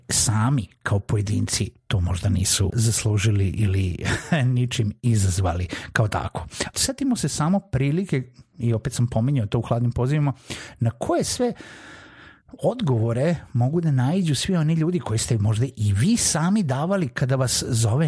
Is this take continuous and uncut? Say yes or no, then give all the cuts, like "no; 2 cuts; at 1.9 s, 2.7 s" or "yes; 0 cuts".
no; 2 cuts; at 2.7 s, 6.7 s